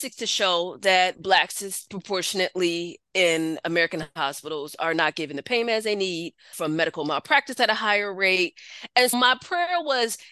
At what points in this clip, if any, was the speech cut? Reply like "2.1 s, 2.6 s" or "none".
6.5 s, 9.1 s